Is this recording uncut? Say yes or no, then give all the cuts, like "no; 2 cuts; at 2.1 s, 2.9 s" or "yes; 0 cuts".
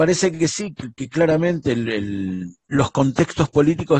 no; 1 cut; at 2.6 s